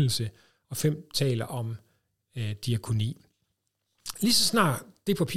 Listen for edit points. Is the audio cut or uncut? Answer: uncut